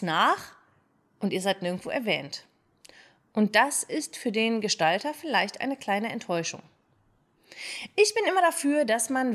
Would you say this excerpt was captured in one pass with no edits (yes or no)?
yes